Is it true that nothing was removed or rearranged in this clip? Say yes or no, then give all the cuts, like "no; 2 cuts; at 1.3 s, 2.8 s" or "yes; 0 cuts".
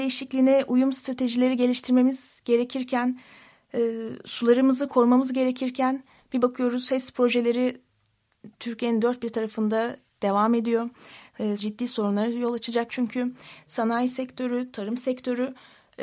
no; 2 cuts; at 11.6 s, 12.9 s